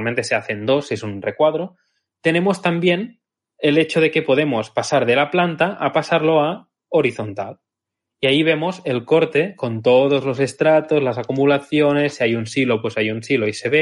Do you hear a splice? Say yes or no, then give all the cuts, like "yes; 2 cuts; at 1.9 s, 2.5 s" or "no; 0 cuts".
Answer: no; 0 cuts